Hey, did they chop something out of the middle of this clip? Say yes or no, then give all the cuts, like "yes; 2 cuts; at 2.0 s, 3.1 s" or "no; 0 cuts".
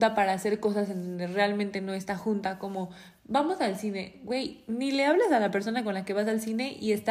no; 0 cuts